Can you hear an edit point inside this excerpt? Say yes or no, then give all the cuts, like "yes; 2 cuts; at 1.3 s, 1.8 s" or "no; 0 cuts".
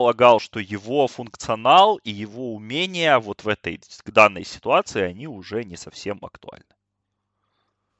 no; 0 cuts